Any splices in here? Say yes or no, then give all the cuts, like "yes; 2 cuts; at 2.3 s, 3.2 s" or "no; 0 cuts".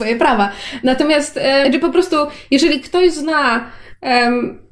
yes; 1 cut; at 1.6 s